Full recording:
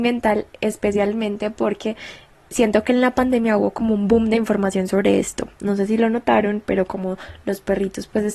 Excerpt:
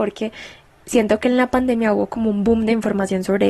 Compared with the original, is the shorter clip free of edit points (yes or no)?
yes